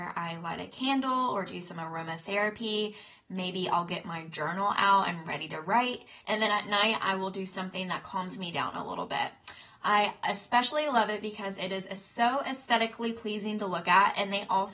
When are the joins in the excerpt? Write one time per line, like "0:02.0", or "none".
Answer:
0:06.2